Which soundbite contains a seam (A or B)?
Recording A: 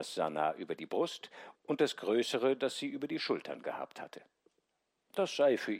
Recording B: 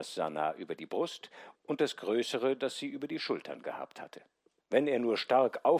B